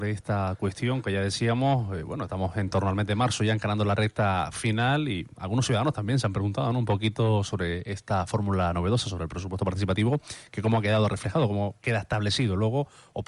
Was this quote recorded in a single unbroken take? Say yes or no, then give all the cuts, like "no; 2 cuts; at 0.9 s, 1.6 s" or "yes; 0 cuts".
yes; 0 cuts